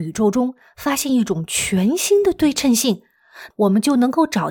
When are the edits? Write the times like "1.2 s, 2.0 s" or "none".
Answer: 3.5 s